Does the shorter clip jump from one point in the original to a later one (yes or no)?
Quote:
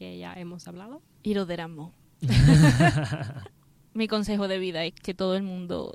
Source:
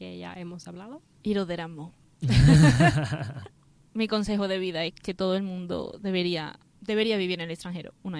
no